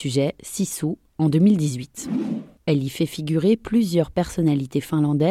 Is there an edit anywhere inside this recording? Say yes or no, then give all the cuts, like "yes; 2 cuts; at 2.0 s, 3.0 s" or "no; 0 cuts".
yes; 1 cut; at 1.1 s